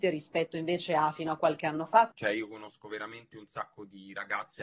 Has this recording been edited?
yes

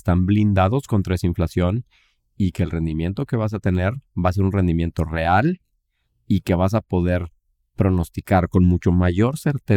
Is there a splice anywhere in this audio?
no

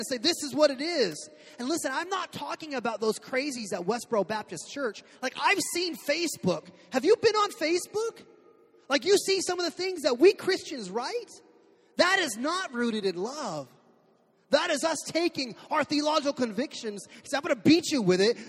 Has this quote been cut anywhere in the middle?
no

